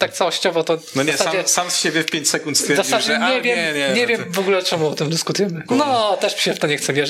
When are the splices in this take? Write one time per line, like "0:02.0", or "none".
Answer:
0:05.7